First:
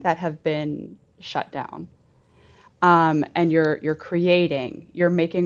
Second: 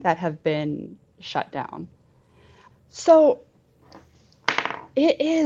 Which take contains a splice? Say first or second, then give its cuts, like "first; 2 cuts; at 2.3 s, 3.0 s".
second; 1 cut; at 2.7 s